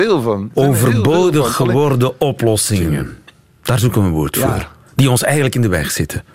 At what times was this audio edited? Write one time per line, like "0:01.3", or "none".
none